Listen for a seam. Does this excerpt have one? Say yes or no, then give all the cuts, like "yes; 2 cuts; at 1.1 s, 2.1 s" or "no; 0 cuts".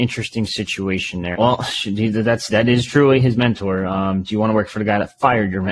yes; 1 cut; at 1.3 s